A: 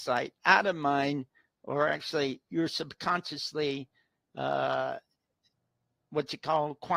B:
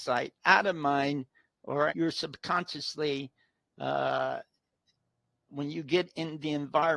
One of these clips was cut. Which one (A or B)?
B